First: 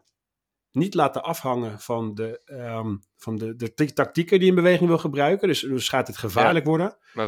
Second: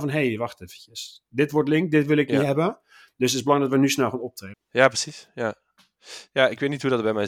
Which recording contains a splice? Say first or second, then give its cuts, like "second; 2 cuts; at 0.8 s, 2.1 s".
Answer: second; 1 cut; at 4.5 s